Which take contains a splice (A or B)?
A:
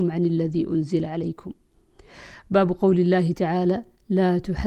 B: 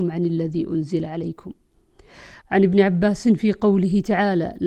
B